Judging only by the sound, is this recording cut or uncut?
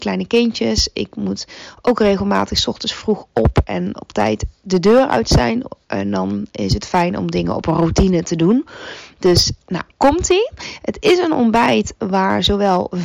cut